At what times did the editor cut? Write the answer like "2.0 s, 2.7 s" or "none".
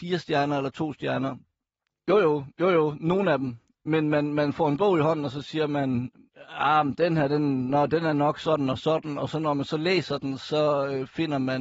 1.9 s